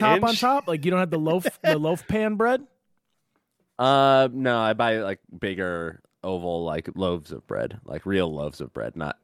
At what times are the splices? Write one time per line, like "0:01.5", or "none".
none